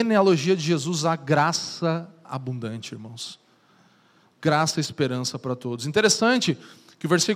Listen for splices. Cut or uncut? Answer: uncut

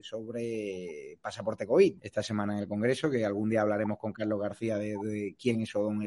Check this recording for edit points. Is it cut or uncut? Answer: cut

